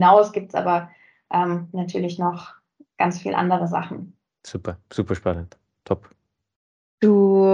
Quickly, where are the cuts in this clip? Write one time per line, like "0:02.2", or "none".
none

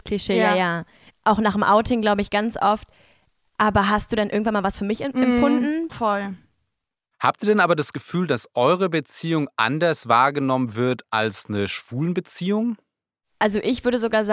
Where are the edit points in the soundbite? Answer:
0:05.9

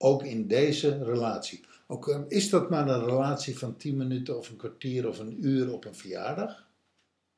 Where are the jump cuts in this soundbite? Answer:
none

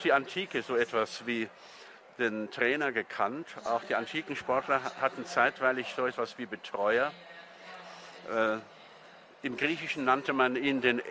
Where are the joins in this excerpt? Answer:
none

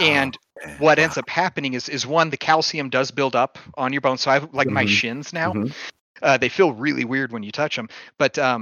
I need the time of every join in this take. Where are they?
0:04.7

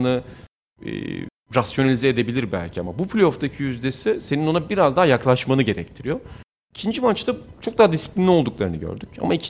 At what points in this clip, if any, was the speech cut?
none

